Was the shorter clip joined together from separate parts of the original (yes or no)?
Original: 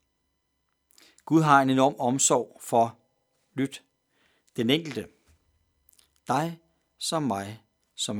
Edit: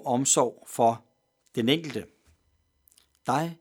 yes